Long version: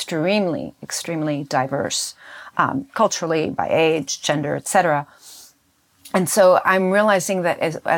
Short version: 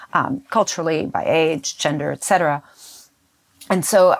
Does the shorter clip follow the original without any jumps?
yes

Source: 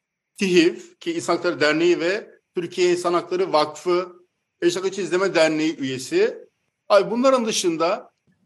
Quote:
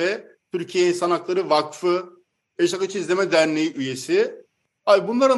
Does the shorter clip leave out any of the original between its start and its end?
no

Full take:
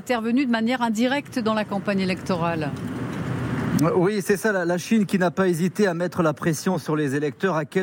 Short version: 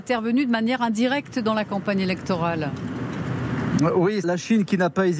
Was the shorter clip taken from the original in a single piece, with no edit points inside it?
no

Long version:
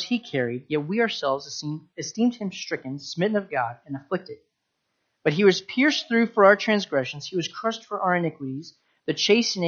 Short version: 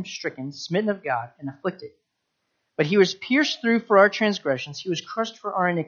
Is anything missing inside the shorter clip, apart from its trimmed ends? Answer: no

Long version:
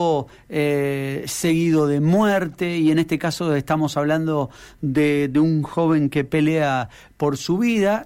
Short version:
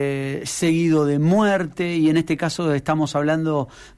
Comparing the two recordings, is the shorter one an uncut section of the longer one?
yes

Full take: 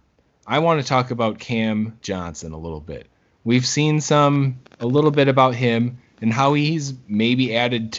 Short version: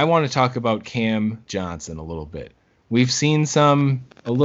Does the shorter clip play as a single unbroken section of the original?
yes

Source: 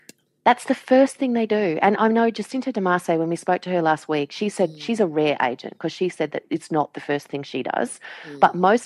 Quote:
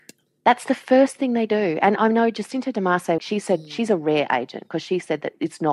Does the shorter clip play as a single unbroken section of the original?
no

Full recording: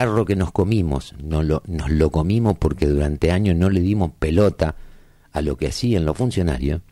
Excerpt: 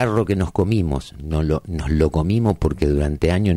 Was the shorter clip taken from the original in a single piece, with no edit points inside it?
yes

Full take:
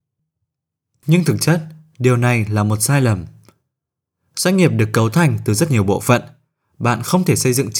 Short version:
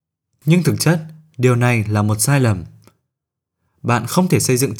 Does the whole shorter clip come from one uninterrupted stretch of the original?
no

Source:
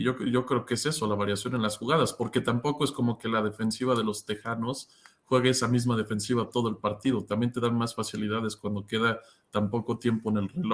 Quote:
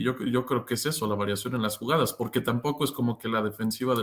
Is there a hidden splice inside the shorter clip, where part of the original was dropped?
no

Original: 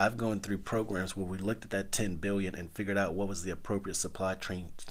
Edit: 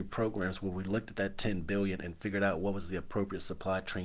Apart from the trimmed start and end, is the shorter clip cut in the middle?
no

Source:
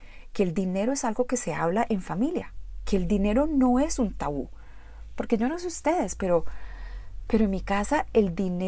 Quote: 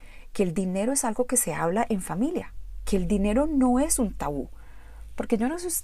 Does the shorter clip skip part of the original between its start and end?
no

